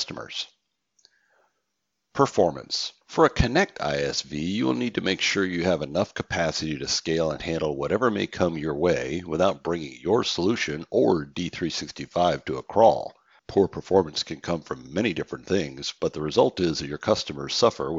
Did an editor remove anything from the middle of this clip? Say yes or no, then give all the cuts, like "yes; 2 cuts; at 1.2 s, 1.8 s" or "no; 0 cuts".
yes; 2 cuts; at 3.0 s, 13.4 s